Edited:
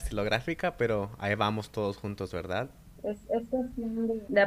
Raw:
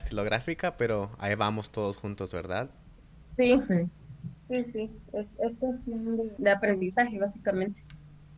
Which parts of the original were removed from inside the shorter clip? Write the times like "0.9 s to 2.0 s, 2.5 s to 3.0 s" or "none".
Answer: 2.9 s to 5.0 s